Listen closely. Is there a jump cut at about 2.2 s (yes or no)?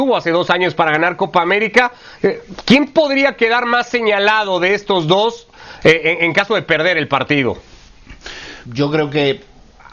no